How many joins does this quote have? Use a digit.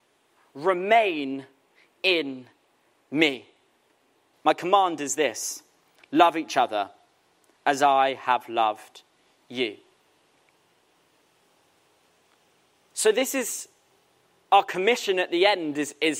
1